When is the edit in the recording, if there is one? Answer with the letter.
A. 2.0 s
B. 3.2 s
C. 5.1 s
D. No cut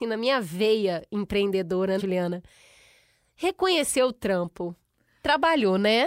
A